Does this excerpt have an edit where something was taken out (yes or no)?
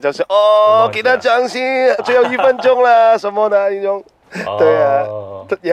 yes